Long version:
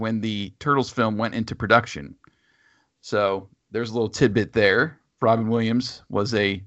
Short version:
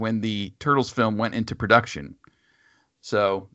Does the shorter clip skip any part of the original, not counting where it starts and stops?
no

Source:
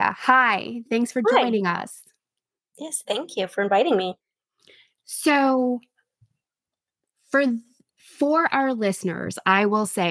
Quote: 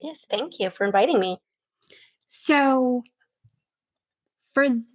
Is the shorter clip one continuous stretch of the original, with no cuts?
yes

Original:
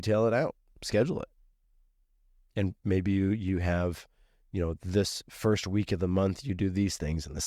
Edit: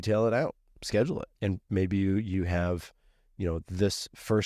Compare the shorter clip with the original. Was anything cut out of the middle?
yes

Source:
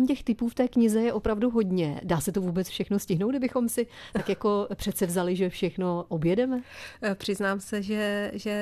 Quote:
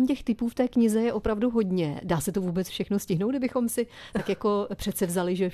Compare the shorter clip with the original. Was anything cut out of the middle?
no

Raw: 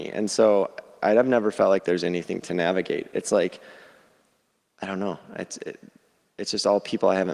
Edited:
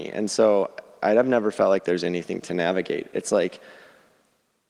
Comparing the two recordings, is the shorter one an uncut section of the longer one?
yes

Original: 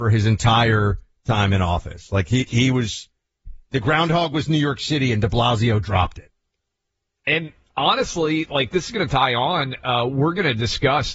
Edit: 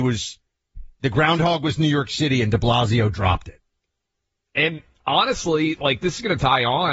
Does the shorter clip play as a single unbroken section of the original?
yes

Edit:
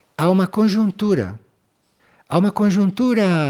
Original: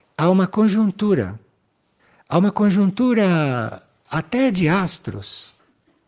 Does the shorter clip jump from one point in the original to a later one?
no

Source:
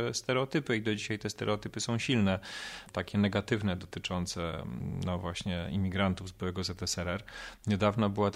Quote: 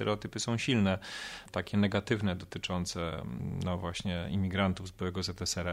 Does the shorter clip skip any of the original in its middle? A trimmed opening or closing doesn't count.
no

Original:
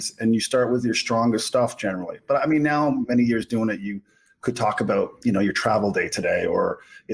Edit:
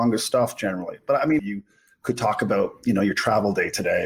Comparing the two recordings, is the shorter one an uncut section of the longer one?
no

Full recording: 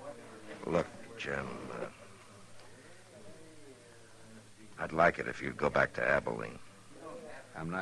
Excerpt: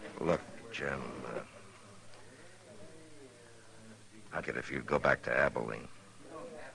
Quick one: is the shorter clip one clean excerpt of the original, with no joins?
no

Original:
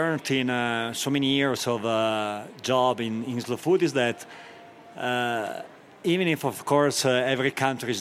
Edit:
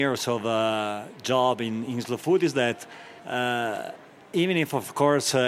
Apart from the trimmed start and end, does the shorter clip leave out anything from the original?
yes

